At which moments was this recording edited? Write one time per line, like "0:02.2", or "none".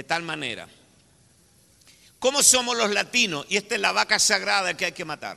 none